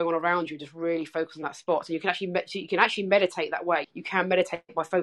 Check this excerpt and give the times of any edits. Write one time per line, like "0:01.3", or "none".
0:03.8